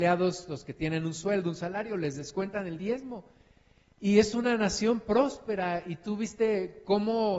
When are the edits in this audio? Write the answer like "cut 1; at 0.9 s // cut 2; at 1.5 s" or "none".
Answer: none